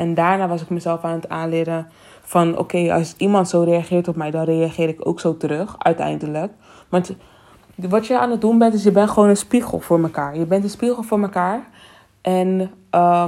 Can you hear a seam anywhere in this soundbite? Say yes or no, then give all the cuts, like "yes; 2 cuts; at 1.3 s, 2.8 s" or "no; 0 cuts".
no; 0 cuts